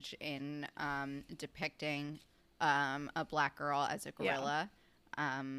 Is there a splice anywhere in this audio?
no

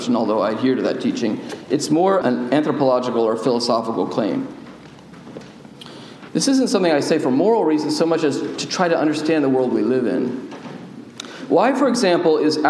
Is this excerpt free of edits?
no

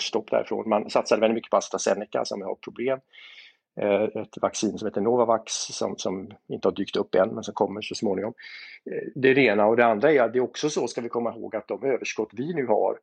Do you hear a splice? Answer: no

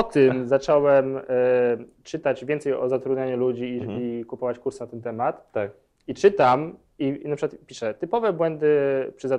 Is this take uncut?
yes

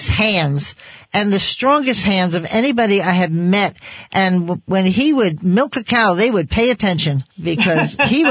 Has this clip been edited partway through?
yes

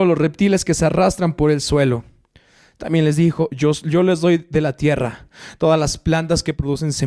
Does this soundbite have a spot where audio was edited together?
no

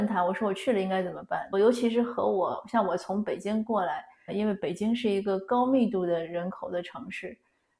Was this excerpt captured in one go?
no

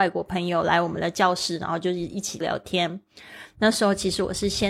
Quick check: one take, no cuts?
no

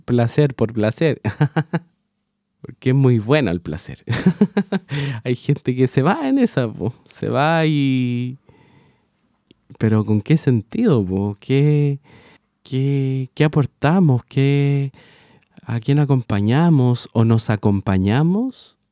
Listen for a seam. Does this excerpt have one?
no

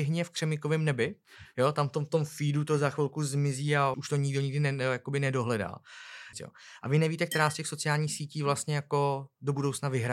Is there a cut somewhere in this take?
yes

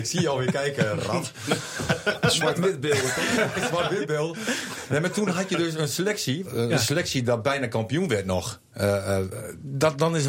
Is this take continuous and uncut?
no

